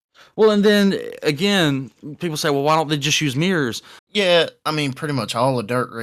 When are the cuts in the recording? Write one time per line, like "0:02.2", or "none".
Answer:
0:04.0

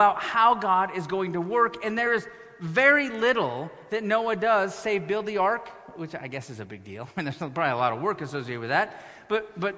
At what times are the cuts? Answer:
none

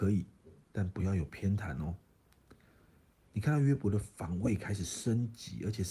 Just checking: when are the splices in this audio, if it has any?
0:02.6

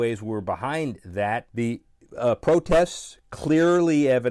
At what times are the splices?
0:01.5

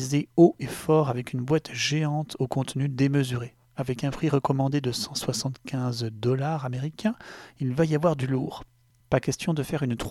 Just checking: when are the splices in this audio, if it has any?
none

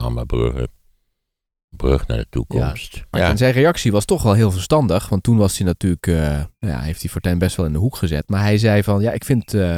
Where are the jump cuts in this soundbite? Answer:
0:03.1

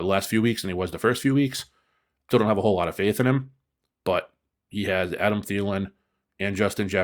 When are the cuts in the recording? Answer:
0:02.3

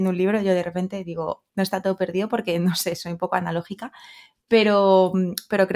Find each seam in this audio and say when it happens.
0:01.5

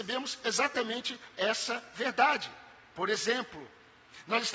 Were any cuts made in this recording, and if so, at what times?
none

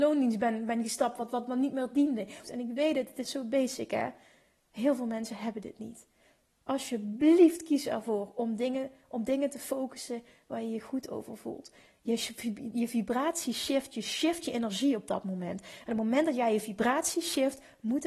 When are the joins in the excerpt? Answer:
0:02.4

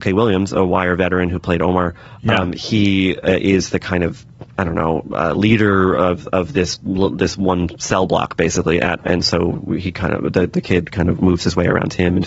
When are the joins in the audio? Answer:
0:09.0

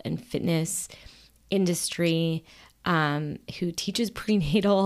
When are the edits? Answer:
none

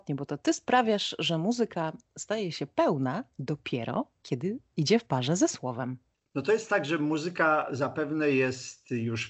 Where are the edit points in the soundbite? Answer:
none

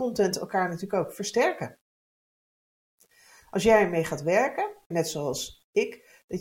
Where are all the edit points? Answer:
0:04.9

